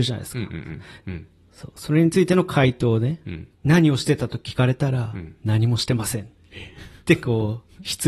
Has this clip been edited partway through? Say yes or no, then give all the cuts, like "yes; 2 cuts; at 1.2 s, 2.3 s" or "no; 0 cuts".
yes; 2 cuts; at 1.0 s, 3.5 s